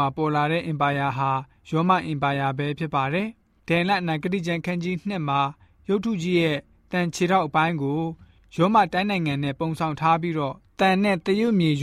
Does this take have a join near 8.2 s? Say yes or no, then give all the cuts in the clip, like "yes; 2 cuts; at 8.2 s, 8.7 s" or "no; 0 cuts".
no; 0 cuts